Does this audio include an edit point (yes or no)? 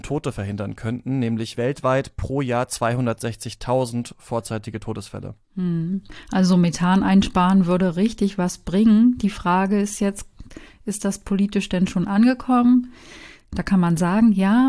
no